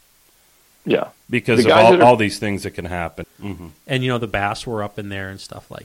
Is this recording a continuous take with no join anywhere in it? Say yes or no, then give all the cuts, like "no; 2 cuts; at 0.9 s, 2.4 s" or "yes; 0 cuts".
no; 1 cut; at 3.2 s